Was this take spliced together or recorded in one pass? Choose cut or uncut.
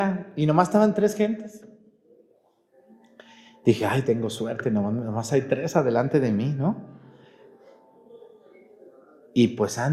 uncut